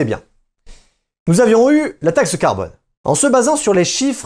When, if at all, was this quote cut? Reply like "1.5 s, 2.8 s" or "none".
3.0 s